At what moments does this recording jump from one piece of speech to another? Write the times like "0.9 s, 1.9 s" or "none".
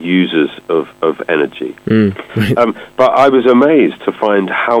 2.3 s